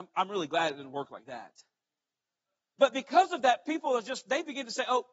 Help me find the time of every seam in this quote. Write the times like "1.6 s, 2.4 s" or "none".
none

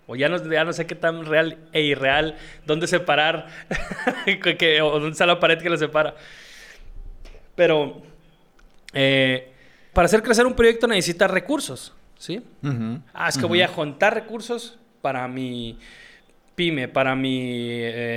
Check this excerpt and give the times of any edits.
9.9 s, 13.1 s

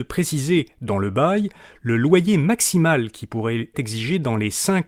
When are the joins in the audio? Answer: 3.7 s

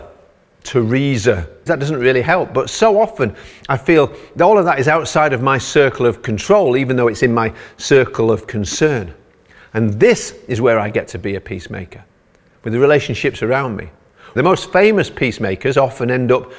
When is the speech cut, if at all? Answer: 1.7 s, 14.4 s

